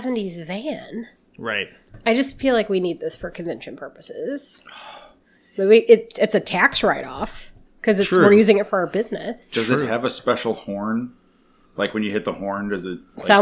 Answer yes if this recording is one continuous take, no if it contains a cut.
yes